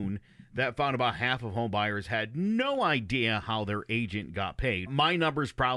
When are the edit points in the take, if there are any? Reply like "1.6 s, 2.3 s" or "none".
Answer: 4.9 s